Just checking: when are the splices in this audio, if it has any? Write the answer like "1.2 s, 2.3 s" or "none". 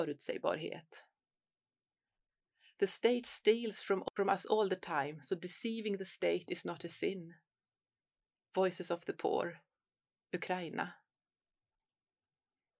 none